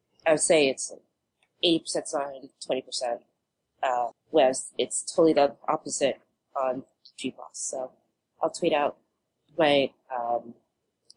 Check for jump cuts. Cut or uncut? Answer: cut